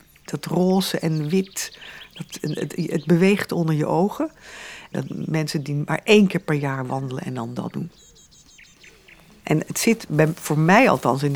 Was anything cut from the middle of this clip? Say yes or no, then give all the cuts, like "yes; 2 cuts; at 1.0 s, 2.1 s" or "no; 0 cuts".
yes; 1 cut; at 4.9 s